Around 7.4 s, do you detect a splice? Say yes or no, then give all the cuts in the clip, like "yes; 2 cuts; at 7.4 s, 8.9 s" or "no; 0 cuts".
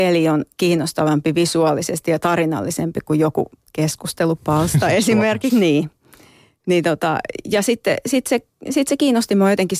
no; 1 cut; at 5.5 s